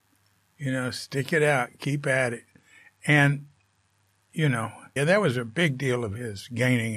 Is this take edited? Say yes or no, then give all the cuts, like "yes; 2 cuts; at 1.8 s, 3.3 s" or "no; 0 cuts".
yes; 1 cut; at 5.0 s